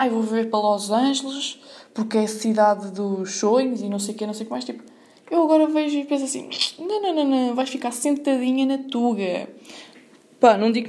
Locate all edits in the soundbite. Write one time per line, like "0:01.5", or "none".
none